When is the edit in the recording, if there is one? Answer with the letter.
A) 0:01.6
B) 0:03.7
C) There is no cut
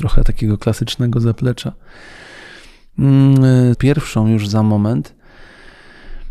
B